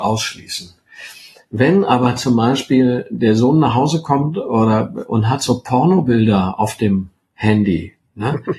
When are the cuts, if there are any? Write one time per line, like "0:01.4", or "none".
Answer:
none